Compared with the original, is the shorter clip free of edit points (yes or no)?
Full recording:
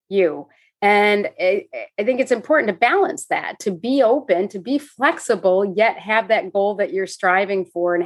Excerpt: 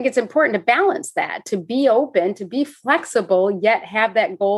yes